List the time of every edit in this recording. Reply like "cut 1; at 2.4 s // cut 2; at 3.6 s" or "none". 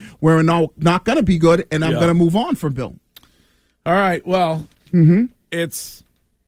cut 1; at 4.9 s